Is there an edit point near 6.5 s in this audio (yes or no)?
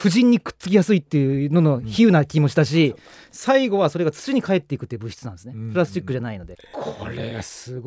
yes